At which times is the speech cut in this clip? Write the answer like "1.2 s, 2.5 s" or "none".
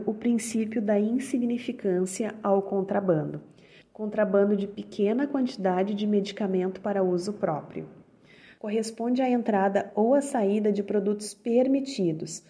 3.8 s, 8.6 s